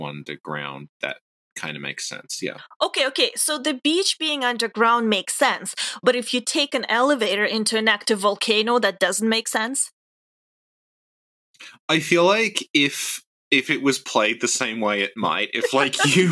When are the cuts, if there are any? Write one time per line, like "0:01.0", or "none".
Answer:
none